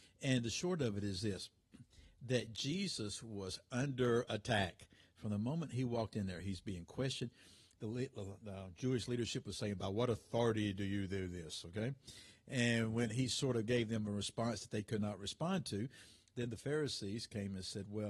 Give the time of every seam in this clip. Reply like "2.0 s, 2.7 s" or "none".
none